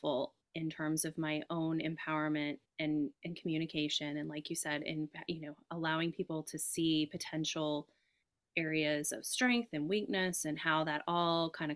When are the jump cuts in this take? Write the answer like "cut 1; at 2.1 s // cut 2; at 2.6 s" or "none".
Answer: none